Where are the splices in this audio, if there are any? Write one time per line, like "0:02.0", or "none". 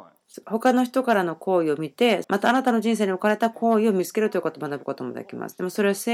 0:02.2